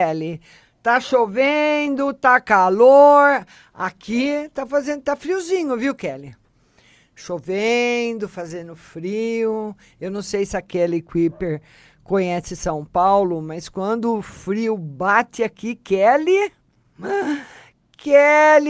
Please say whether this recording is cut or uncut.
uncut